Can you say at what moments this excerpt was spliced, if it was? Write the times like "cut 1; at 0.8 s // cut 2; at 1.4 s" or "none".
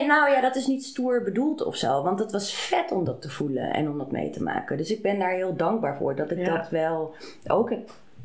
none